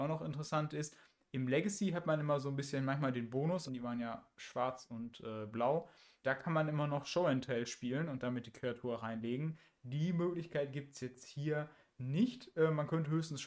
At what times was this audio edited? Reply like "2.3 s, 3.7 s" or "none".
3.7 s, 6.2 s